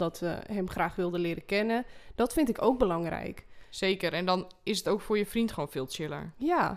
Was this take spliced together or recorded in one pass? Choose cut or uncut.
uncut